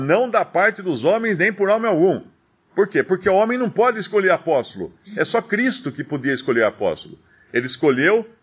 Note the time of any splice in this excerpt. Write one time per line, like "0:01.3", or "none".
none